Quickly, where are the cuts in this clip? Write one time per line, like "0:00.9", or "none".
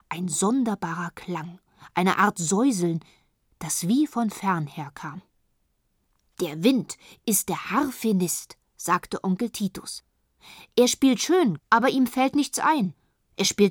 0:11.6

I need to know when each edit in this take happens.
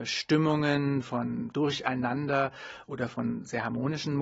0:01.5

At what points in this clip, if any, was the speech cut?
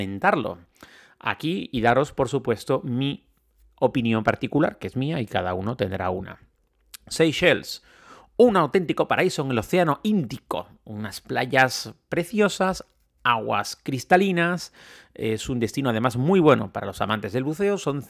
none

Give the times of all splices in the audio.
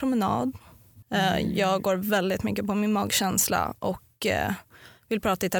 0:01.0

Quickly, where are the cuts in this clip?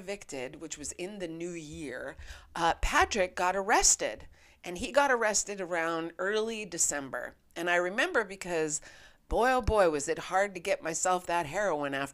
none

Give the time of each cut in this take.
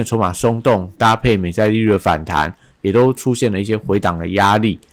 none

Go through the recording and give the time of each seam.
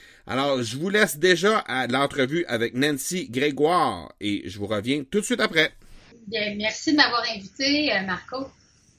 0:06.1

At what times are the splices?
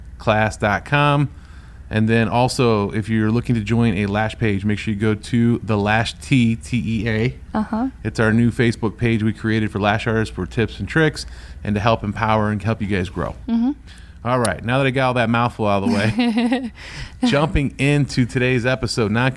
none

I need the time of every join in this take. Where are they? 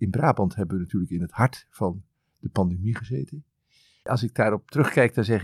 0:04.0

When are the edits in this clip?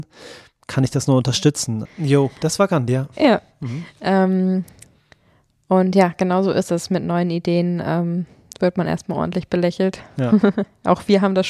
0:01.8

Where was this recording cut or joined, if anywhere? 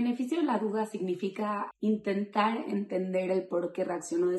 0:01.7

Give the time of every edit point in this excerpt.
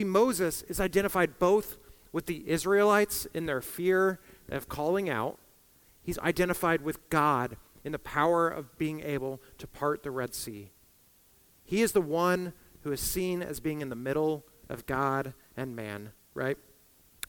0:06.2

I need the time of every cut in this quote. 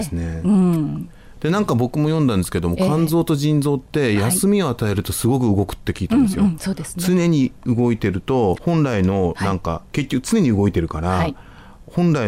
0:08.6

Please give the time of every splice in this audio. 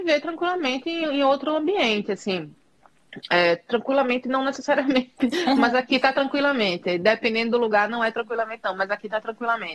none

